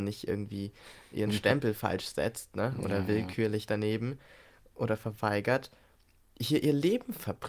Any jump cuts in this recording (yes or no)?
no